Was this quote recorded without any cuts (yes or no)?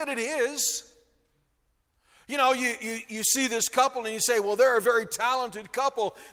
yes